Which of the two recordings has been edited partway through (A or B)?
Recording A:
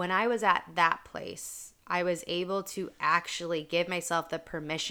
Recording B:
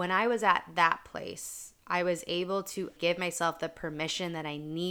B